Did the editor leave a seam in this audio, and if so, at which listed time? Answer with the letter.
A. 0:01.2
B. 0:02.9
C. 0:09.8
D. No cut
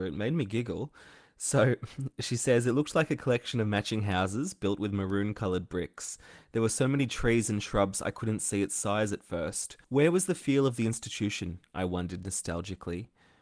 C